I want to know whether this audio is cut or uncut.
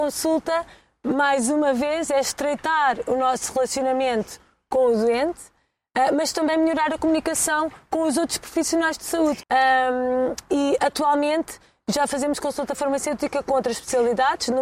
cut